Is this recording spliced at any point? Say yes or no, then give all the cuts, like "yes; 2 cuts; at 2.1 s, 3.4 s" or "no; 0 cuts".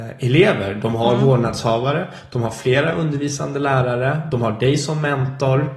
no; 0 cuts